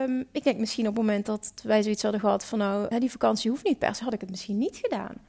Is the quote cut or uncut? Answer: cut